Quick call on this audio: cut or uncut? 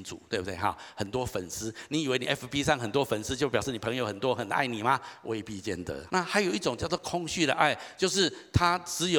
cut